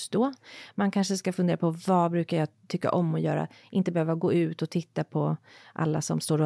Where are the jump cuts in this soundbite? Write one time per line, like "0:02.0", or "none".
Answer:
0:03.6

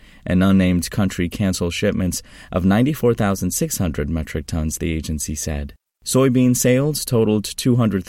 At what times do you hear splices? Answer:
none

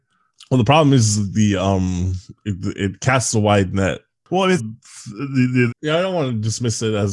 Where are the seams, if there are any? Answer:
0:04.6
0:05.7

